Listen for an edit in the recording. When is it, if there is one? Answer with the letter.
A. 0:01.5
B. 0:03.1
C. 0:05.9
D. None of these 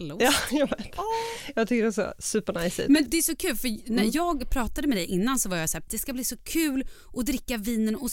C